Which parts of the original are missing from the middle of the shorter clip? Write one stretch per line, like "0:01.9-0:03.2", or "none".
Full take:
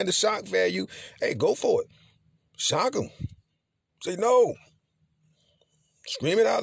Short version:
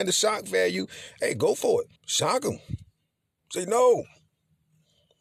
0:02.0-0:02.5